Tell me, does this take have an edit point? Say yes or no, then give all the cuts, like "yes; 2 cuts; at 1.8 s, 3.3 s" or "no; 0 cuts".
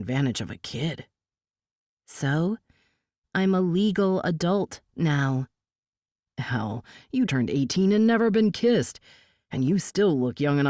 yes; 1 cut; at 7.3 s